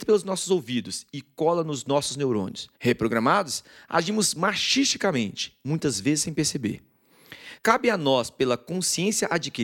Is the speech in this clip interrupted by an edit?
yes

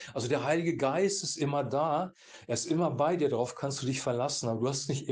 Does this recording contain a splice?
no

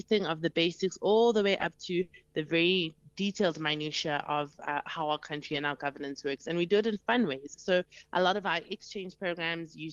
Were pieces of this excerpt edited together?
no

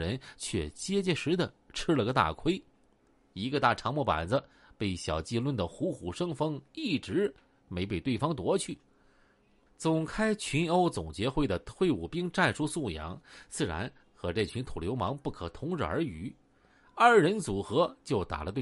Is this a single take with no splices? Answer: no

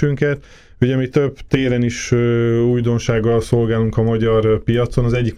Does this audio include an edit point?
no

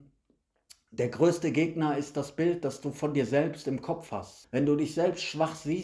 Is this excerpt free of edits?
no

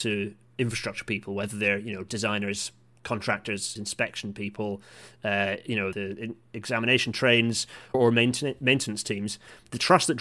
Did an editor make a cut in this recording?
yes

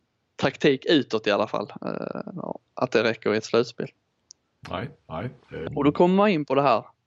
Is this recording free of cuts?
no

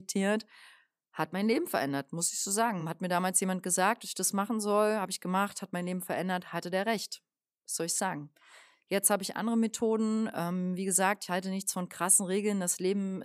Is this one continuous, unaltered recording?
yes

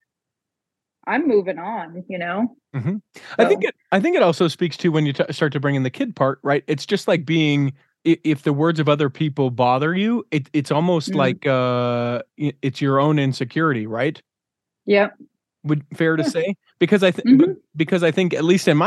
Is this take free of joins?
yes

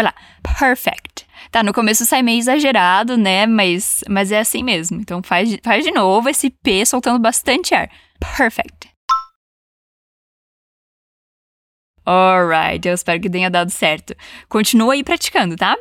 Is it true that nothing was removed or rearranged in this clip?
yes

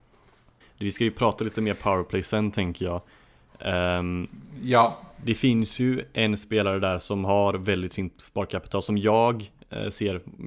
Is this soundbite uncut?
yes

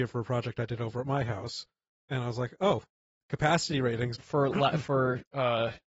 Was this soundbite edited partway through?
yes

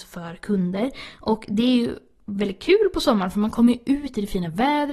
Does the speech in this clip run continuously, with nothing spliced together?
yes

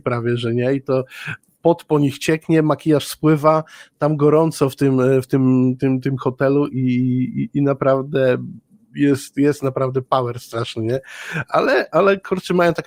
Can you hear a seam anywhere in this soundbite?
no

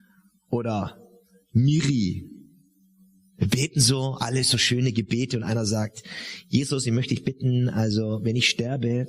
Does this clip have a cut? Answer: no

